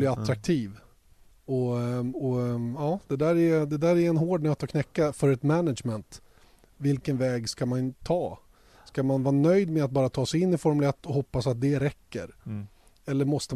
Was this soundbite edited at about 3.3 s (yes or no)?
no